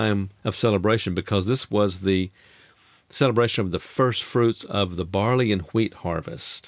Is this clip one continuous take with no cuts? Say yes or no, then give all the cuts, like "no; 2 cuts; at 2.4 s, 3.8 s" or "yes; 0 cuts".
yes; 0 cuts